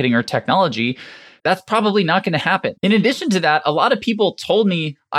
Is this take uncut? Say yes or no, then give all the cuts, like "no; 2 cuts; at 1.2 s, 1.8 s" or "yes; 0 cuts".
no; 2 cuts; at 1.4 s, 2.7 s